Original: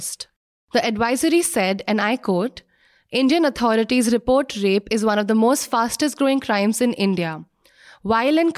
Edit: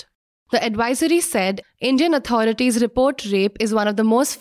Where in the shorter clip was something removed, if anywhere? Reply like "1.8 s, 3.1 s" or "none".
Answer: 1.6 s